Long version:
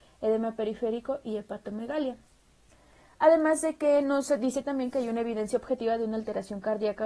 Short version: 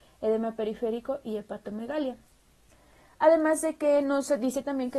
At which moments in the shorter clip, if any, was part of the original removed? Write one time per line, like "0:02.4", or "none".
none